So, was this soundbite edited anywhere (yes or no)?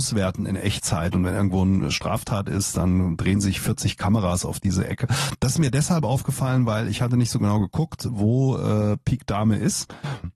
no